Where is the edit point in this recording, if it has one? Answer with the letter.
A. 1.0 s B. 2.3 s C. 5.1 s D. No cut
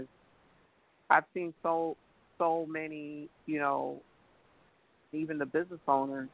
C